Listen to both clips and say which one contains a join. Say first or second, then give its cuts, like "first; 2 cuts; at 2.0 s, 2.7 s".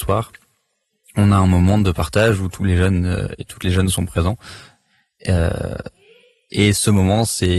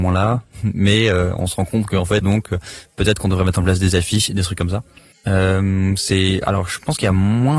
second; 2 cuts; at 2.2 s, 5.1 s